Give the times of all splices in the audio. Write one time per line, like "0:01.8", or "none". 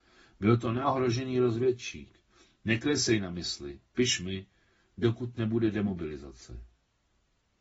none